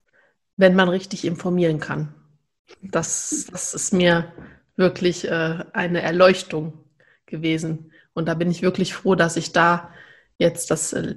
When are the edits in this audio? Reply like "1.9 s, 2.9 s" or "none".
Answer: none